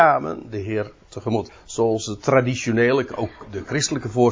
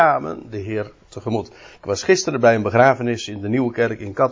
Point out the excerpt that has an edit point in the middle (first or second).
first